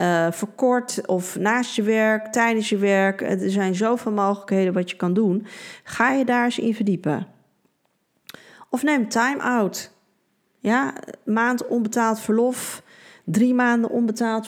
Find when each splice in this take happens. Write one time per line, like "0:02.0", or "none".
none

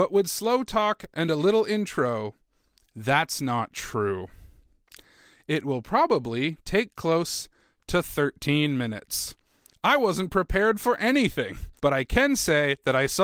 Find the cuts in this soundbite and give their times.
0:09.7
0:11.8

